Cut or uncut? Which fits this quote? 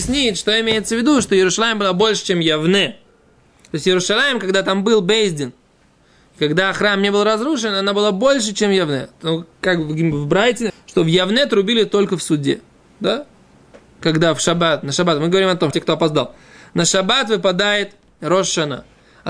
cut